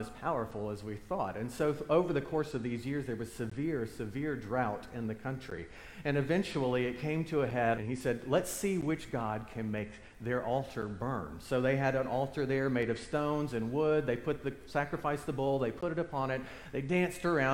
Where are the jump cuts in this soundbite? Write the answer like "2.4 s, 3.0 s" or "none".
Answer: 7.7 s